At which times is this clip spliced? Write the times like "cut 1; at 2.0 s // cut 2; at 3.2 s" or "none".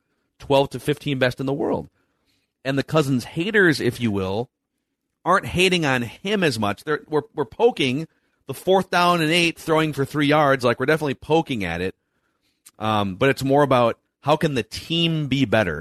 none